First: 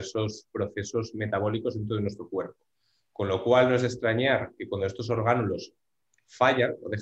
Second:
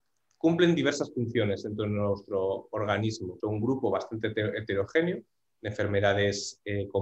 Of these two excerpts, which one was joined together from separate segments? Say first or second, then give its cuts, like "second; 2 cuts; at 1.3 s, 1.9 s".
second; 1 cut; at 3.4 s